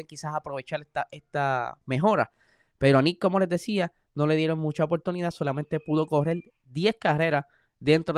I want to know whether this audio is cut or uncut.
uncut